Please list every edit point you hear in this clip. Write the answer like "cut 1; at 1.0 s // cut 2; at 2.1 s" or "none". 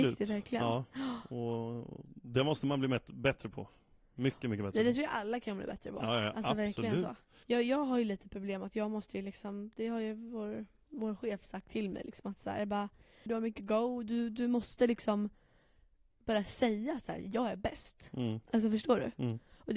cut 1; at 7.4 s // cut 2; at 13.3 s